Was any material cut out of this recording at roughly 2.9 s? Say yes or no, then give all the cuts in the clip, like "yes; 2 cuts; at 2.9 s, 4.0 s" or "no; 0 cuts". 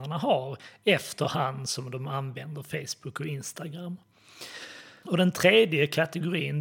no; 1 cut; at 5.0 s